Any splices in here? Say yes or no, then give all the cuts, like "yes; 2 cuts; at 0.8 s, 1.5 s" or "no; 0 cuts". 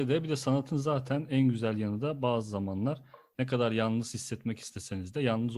no; 0 cuts